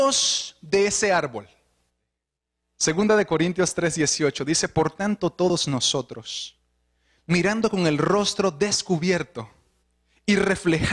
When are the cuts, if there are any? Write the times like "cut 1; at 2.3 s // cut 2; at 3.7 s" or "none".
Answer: none